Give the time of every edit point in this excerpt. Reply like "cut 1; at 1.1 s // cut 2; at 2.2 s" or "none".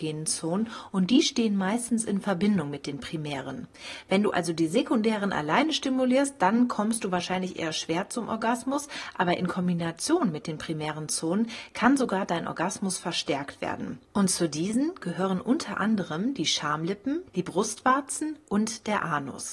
cut 1; at 17.3 s